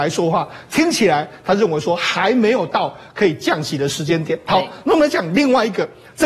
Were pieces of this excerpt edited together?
no; 0 cuts

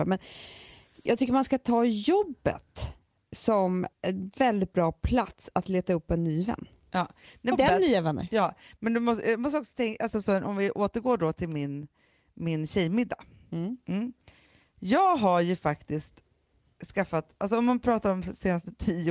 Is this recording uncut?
no; 1 cut; at 7.5 s

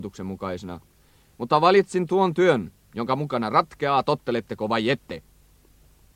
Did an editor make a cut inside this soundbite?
no; 0 cuts

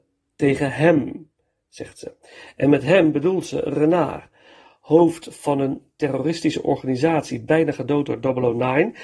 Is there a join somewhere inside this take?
no; 0 cuts

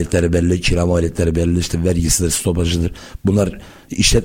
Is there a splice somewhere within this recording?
yes; 1 cut; at 2.3 s

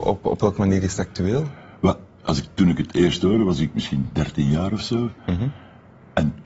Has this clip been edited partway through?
no; 0 cuts

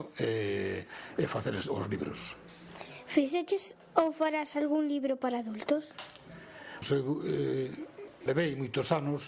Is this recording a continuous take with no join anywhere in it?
no; 2 cuts; at 6.8 s, 8.3 s

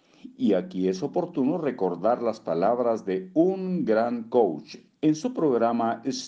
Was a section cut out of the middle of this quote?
yes; 1 cut; at 4.9 s

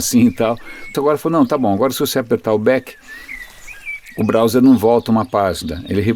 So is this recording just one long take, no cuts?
no; 1 cut; at 0.9 s

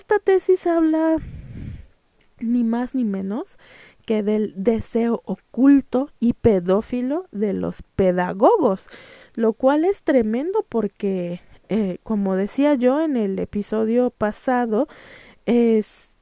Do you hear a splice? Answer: no; 0 cuts

